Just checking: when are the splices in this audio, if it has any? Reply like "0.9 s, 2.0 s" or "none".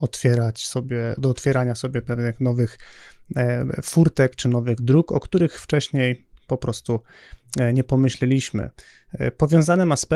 1.2 s

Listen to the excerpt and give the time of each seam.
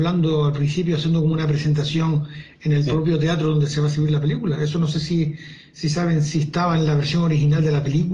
none

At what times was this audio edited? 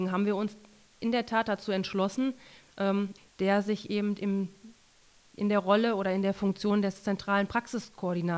3.2 s

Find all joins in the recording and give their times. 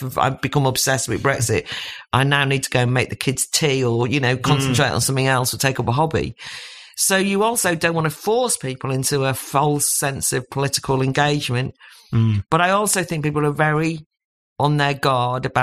none

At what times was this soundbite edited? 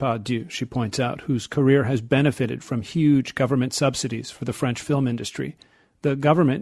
none

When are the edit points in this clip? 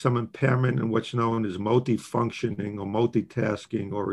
none

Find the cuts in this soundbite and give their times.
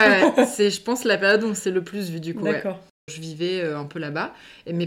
3.1 s

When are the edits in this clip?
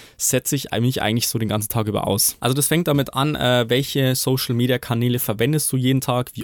none

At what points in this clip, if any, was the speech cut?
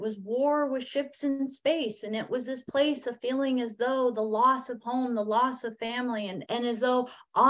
6.4 s

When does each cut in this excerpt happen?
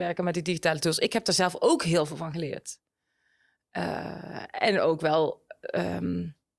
none

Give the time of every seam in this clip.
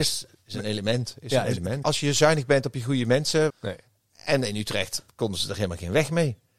1.8 s, 3.5 s

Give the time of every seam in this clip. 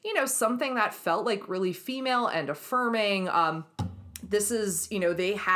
none

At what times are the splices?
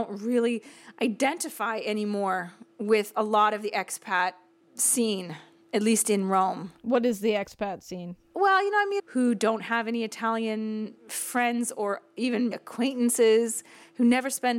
9.0 s, 11.0 s, 12.5 s

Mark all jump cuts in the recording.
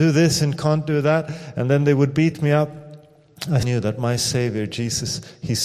3.6 s

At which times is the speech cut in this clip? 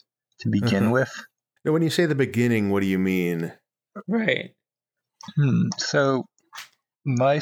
1.6 s, 4.0 s

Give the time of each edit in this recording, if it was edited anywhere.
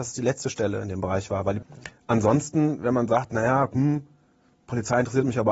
1.6 s

